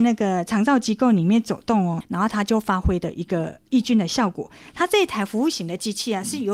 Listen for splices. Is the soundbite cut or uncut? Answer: cut